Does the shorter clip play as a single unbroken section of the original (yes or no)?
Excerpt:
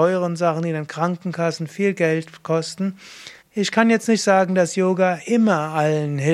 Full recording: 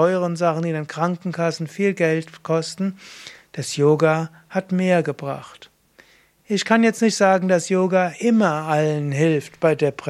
no